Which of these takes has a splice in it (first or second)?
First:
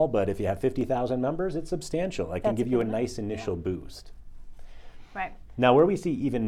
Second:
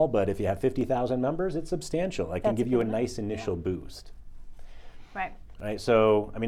second